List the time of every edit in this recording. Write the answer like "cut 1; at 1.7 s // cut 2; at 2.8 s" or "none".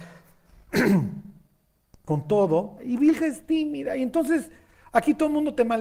cut 1; at 2.8 s